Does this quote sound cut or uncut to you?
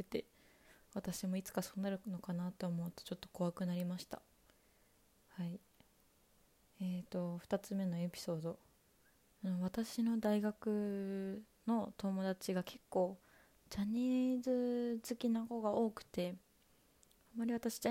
uncut